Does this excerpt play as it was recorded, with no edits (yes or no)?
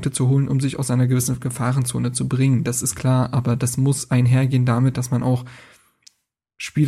yes